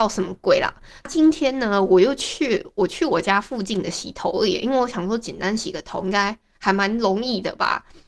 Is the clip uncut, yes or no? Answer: no